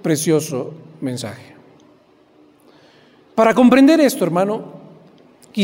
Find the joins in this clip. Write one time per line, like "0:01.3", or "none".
none